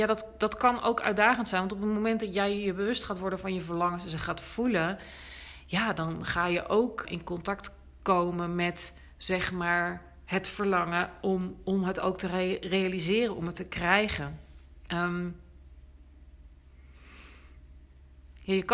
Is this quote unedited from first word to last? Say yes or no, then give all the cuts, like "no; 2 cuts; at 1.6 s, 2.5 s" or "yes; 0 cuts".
no; 1 cut; at 7.0 s